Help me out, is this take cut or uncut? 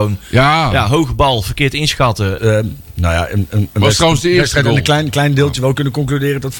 cut